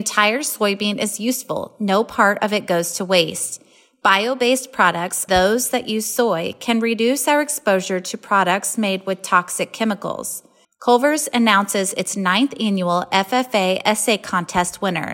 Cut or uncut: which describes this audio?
cut